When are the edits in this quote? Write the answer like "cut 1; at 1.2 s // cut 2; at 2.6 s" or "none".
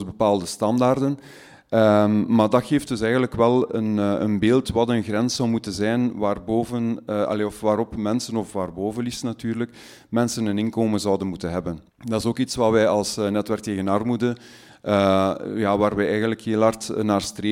cut 1; at 11.9 s